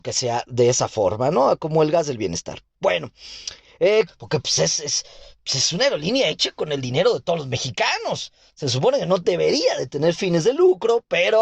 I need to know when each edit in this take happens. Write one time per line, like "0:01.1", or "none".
0:04.1